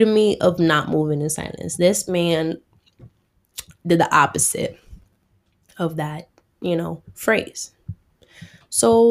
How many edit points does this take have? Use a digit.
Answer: 0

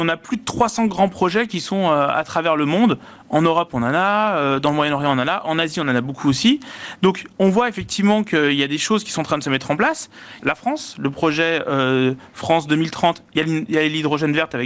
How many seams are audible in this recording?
1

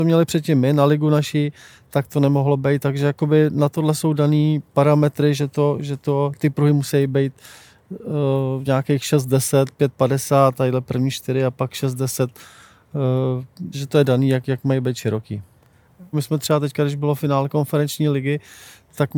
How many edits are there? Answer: 2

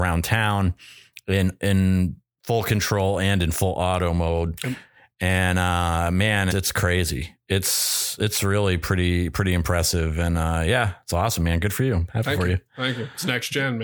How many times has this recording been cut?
1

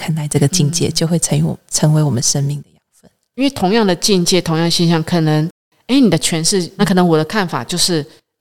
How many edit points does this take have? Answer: 1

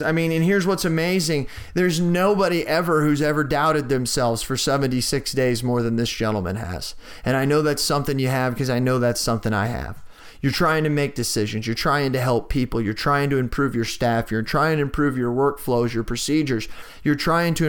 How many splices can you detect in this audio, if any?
0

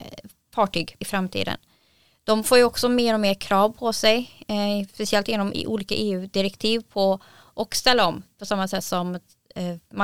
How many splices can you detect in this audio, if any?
0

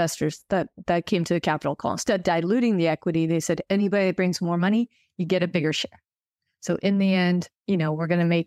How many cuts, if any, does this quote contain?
0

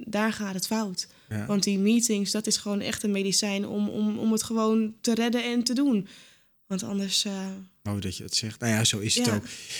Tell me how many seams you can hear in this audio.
0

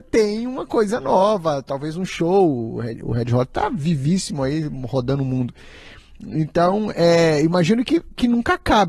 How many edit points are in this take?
0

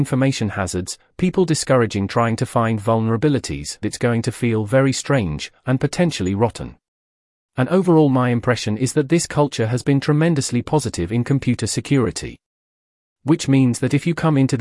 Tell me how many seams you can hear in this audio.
2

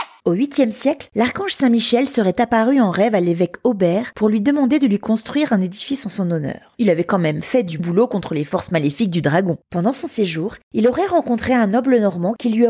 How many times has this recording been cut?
2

